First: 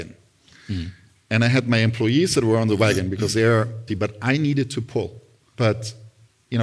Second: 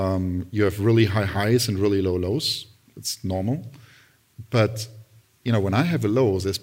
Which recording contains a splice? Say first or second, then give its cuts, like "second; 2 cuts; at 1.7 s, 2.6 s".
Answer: first; 2 cuts; at 3.9 s, 5.5 s